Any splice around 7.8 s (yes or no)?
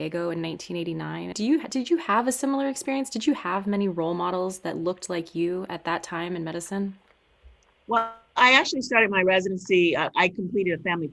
no